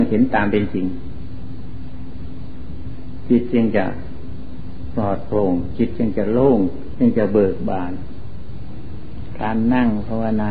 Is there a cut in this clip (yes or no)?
yes